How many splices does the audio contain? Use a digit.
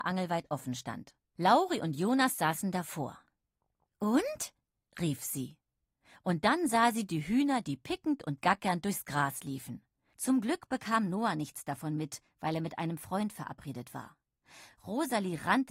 1